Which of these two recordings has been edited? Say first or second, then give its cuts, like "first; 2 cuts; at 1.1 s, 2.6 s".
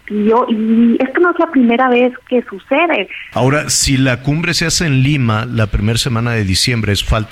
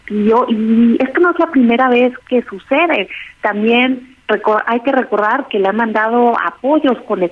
first; 1 cut; at 3.3 s